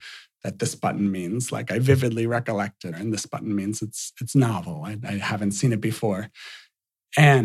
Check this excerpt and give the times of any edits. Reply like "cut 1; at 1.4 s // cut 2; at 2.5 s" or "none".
cut 1; at 2.9 s